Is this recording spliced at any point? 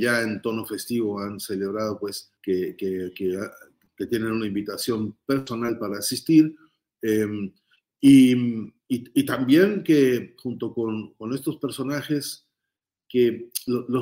yes; 1 cut; at 2.4 s

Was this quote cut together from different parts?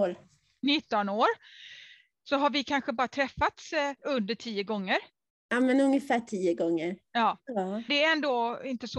yes; 2 cuts; at 4.0 s, 7.9 s

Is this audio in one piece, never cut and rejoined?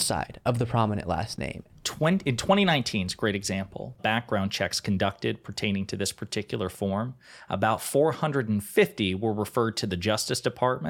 no; 2 cuts; at 1.7 s, 4.0 s

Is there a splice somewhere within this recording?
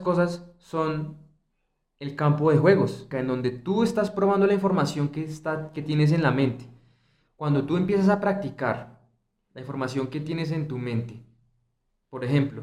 yes; 1 cut; at 3.1 s

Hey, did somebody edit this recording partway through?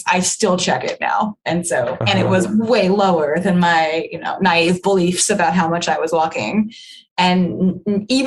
yes; 1 cut; at 2.0 s

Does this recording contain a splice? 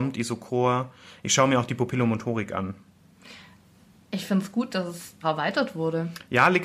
yes; 1 cut; at 5.2 s

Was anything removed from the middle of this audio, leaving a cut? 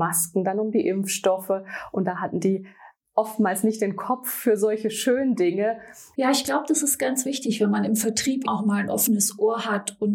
yes; 2 cuts; at 6.1 s, 8.4 s

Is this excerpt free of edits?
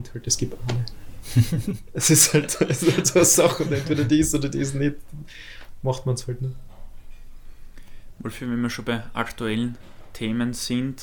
yes; 0 cuts

